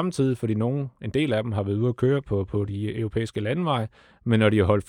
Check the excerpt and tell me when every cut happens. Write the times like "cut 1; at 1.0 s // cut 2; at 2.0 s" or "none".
none